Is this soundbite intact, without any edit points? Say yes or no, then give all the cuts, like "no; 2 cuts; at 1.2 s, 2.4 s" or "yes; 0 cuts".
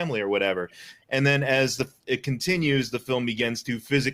yes; 0 cuts